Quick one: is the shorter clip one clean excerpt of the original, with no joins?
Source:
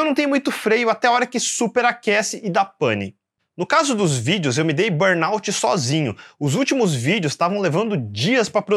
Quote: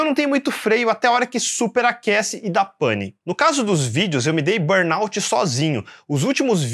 no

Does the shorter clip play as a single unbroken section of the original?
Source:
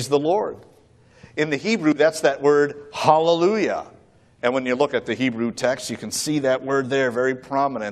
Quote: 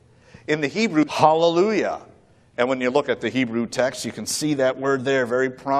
no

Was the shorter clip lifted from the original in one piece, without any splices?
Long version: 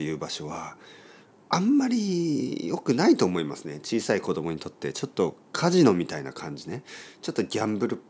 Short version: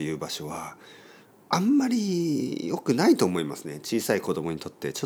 yes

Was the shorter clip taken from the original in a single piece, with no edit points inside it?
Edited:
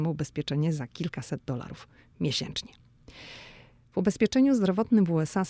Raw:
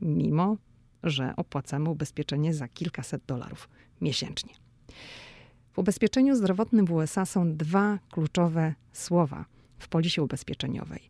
yes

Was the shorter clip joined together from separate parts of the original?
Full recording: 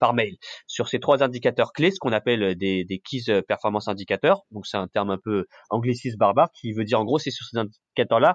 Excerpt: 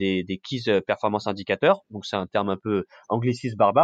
no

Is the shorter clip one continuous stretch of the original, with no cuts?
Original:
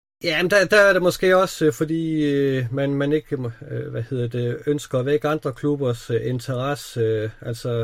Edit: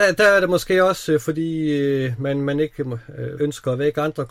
no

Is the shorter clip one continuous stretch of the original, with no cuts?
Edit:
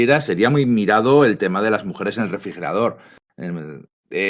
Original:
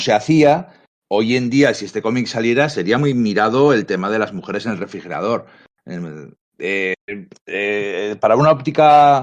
yes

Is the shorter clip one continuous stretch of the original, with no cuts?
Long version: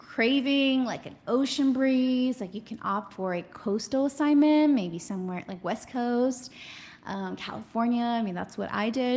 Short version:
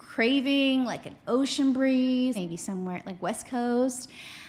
no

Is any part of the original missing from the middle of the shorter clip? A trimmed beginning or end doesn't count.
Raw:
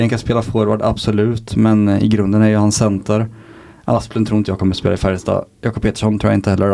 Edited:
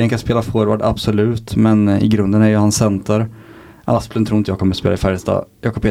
no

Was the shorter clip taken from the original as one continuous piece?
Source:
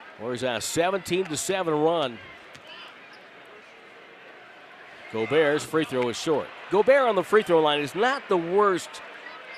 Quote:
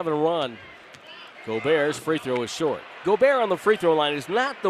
no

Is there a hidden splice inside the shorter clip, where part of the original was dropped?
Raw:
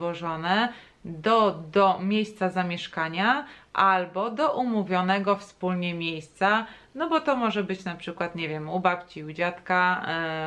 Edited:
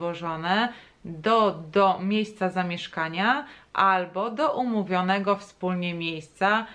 no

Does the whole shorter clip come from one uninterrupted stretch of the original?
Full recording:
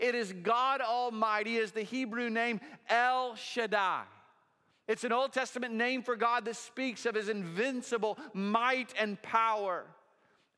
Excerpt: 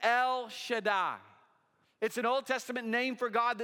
yes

